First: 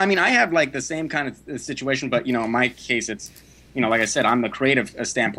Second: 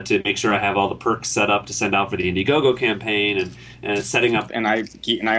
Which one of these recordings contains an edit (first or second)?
second